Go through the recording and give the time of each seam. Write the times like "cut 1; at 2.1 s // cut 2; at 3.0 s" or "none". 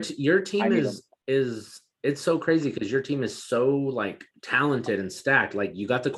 cut 1; at 4.3 s